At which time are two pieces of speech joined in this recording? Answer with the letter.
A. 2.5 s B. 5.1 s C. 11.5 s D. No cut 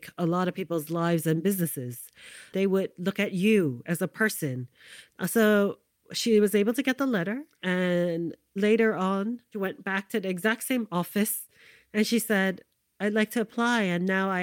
A